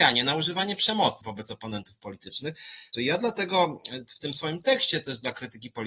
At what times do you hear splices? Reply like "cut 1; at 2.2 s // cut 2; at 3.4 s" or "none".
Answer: cut 1; at 1.2 s // cut 2; at 2.9 s